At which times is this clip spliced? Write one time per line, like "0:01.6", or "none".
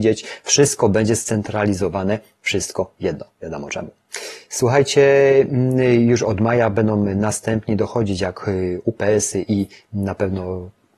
0:03.3